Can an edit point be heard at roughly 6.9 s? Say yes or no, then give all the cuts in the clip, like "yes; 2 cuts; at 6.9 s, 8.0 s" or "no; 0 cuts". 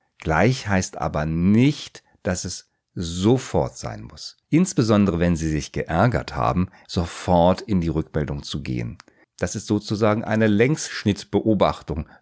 yes; 2 cuts; at 6.9 s, 9.2 s